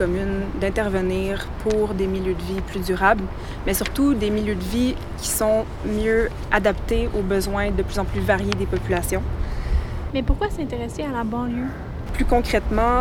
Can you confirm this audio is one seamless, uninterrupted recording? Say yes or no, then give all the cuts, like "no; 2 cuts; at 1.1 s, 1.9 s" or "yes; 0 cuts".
no; 2 cuts; at 10.1 s, 12.1 s